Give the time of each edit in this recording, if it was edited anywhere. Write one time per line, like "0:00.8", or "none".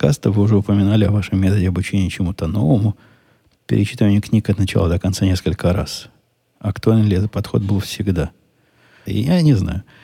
0:09.1